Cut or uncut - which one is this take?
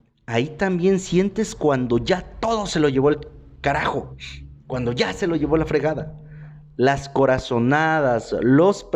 uncut